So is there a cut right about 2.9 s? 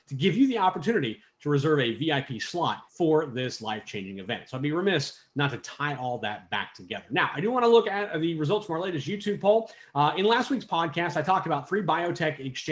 yes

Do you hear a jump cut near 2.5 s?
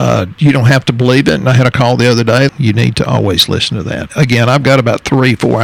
yes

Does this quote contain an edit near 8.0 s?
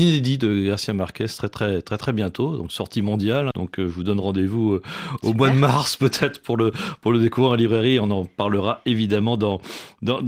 no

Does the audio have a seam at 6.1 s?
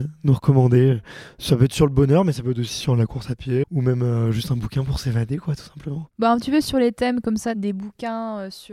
no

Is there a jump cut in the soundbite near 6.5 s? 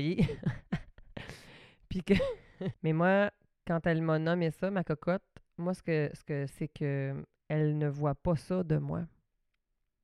yes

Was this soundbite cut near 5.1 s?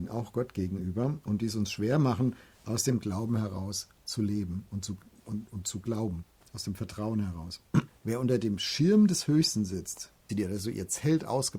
no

